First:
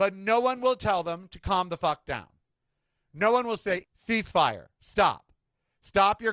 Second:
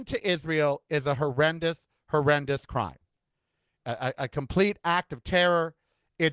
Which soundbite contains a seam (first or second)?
first